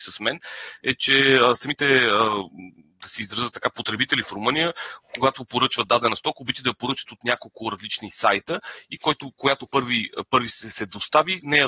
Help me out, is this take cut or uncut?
uncut